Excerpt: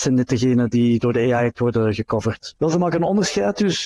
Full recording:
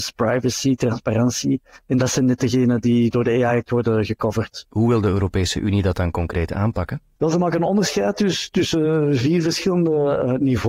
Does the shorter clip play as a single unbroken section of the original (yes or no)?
no